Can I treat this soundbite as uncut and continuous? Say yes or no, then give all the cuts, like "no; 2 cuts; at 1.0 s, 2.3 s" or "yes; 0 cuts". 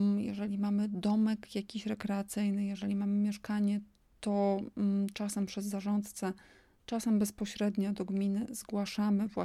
yes; 0 cuts